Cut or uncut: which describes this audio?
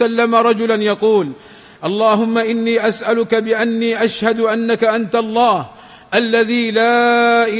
uncut